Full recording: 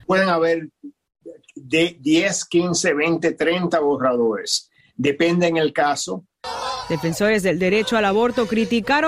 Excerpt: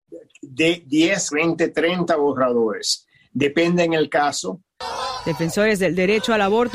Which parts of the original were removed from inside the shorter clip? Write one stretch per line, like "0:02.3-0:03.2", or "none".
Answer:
0:02.4-0:02.9